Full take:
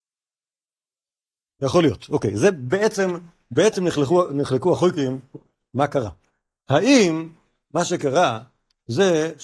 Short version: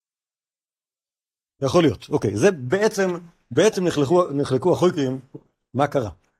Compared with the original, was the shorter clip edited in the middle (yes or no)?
no